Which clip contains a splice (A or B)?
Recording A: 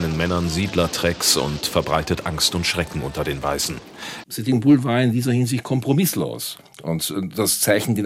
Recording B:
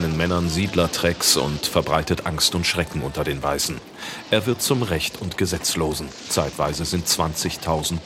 A